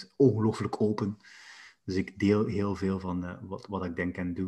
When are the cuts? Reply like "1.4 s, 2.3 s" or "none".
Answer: none